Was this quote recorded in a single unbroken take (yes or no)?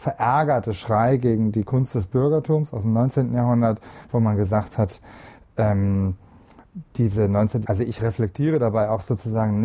no